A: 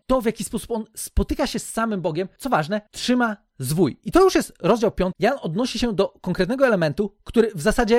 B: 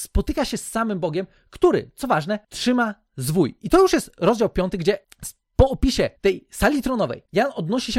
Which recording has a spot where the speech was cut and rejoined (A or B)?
A